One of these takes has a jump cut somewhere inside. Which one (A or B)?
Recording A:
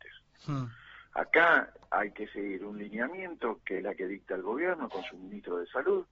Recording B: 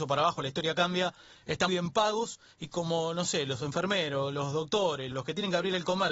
B